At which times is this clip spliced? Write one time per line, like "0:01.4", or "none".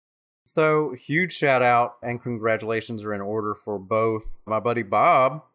0:02.0
0:04.5